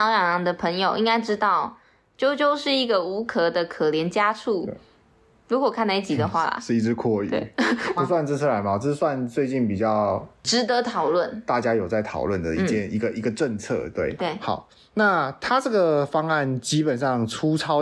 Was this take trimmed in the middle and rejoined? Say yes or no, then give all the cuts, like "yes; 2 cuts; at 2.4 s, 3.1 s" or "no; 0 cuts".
yes; 2 cuts; at 8.0 s, 14.2 s